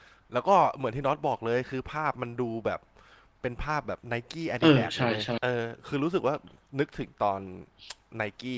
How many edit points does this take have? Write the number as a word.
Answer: zero